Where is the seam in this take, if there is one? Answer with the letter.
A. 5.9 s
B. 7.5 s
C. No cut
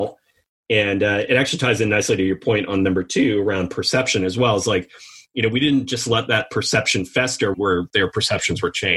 B